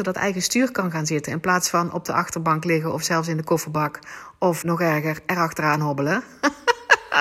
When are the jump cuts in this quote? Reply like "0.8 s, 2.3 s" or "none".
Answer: 4.6 s